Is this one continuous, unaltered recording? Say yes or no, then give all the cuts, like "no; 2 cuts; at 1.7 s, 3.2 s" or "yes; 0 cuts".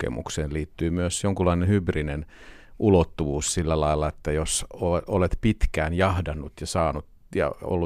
yes; 0 cuts